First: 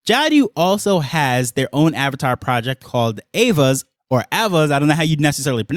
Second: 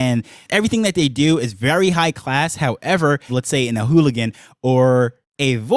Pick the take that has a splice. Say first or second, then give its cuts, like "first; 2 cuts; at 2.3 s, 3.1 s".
second; 1 cut; at 3.3 s